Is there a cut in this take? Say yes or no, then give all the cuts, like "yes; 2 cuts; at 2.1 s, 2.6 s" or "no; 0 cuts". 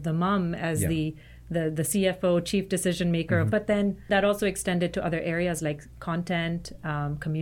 yes; 1 cut; at 3.5 s